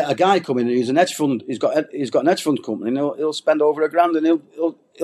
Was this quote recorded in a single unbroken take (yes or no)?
yes